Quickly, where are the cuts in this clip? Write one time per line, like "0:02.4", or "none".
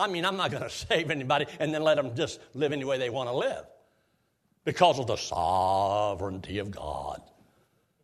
none